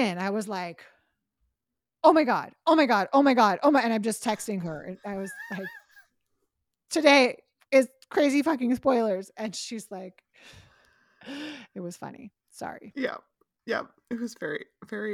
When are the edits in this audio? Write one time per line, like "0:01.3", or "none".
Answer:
none